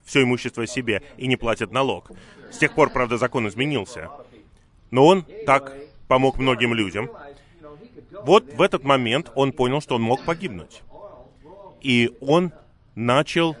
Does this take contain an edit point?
no; 0 cuts

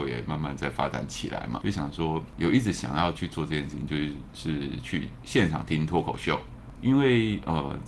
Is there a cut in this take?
yes; 1 cut; at 1.6 s

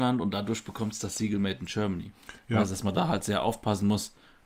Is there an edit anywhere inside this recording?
no; 0 cuts

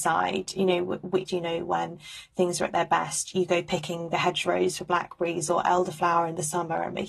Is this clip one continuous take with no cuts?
no; 1 cut; at 1.3 s

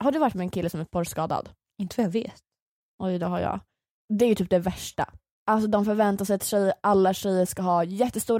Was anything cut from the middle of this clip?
no; 0 cuts

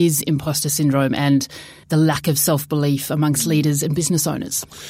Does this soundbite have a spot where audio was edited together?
no; 0 cuts

